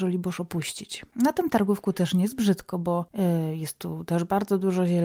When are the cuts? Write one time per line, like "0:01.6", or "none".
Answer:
0:01.1